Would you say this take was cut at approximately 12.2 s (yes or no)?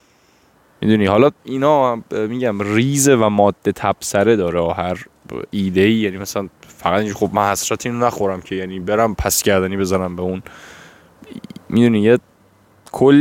no